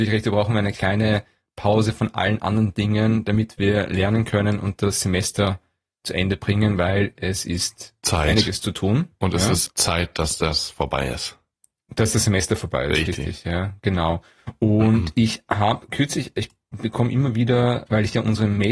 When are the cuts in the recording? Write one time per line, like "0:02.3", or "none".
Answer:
0:09.7